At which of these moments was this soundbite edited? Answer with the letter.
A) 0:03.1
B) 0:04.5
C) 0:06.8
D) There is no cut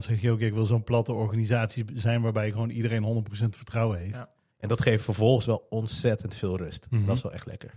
B